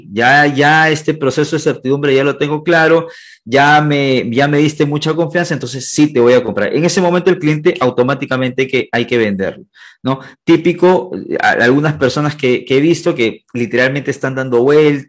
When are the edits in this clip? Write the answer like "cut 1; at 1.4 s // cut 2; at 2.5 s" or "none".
none